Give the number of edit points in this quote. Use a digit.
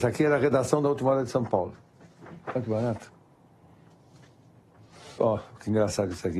1